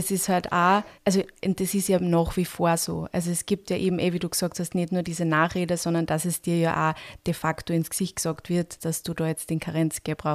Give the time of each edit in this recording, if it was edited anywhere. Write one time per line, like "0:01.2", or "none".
0:00.9
0:08.8